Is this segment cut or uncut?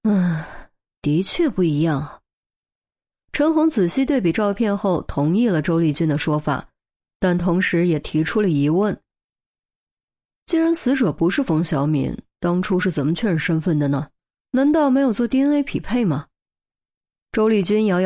uncut